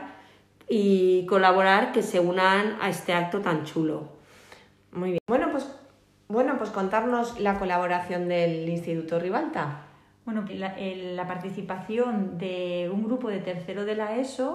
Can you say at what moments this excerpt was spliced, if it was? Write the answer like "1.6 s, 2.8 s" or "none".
10.5 s